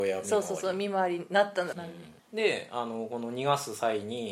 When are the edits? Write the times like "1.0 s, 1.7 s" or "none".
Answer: 1.7 s

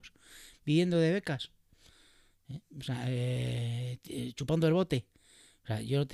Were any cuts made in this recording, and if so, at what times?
none

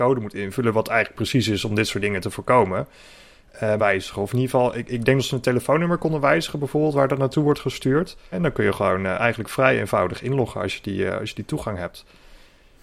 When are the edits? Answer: 3.8 s, 8.3 s

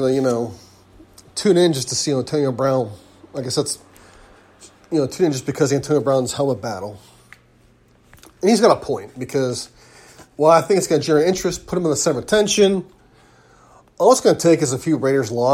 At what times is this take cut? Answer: none

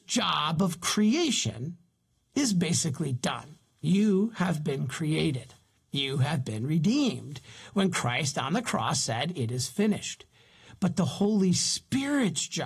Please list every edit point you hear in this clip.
5.8 s

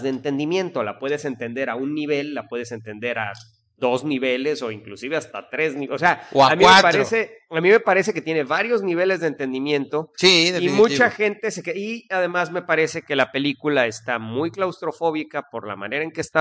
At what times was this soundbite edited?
none

